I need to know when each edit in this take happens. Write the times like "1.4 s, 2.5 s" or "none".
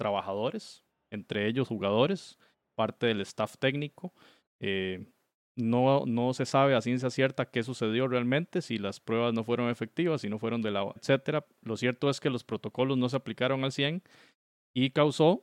4.5 s, 11.0 s